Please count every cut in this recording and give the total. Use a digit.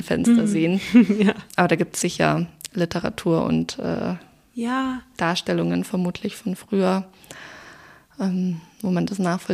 1